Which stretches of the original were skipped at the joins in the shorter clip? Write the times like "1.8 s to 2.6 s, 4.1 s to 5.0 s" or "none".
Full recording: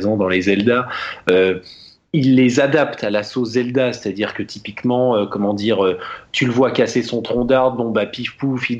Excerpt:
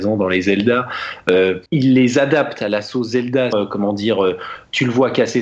1.7 s to 2.1 s, 3.9 s to 5.1 s